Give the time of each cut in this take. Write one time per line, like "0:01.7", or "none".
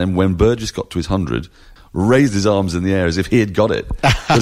0:01.8